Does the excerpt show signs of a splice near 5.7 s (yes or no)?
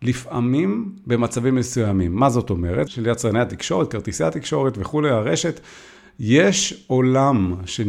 no